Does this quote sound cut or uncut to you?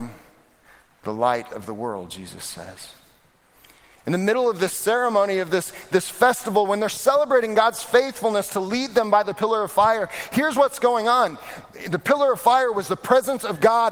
uncut